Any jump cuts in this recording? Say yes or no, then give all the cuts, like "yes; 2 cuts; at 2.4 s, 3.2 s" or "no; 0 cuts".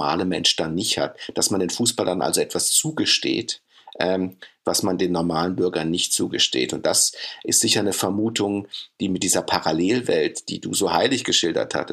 no; 0 cuts